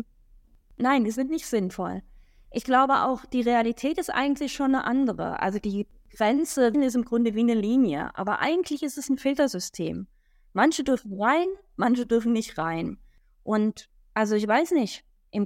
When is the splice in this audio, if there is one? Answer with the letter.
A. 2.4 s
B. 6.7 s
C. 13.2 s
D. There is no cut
B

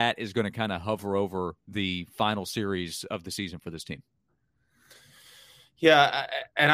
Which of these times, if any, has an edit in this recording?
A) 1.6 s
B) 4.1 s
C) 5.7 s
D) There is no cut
A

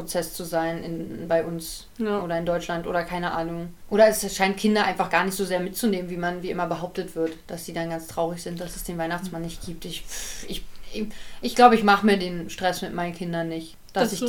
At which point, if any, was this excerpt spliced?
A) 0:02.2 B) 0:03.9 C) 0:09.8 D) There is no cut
D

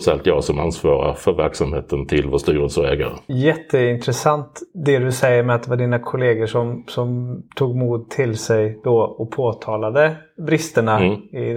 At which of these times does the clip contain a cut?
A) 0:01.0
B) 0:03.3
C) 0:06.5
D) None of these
B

